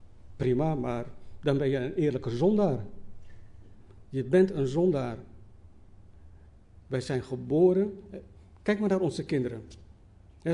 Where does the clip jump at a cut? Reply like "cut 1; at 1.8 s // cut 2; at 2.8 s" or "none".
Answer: cut 1; at 4.0 s // cut 2; at 6.8 s